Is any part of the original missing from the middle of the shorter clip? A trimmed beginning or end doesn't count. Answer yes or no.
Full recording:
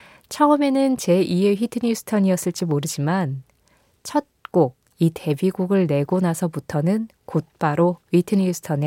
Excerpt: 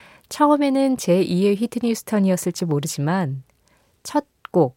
no